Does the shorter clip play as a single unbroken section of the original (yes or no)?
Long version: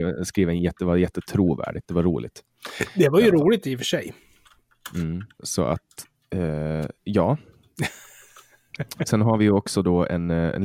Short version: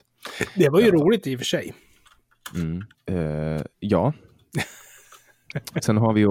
no